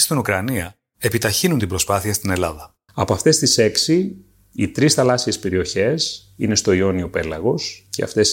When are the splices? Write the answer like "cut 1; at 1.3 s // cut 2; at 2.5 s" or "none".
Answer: cut 1; at 2.9 s